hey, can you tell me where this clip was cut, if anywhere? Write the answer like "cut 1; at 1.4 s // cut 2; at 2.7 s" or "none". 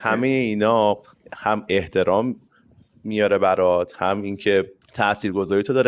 cut 1; at 4.8 s

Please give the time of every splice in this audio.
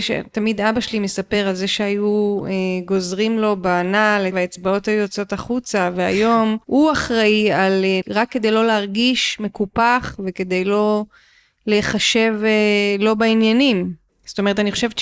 cut 1; at 8.0 s // cut 2; at 14.1 s

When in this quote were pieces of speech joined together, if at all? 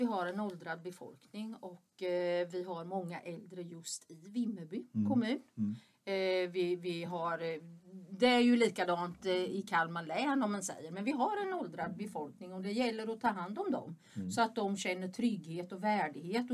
none

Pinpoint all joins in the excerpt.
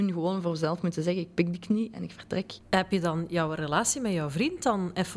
none

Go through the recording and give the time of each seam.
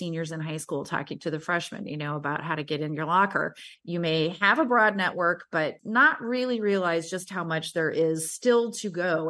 cut 1; at 3.7 s

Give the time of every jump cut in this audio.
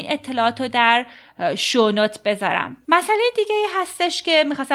none

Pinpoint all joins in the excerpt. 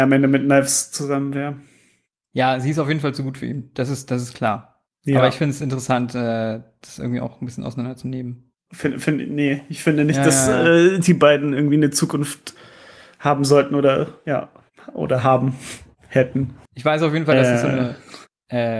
cut 1; at 8.7 s // cut 2; at 16.7 s

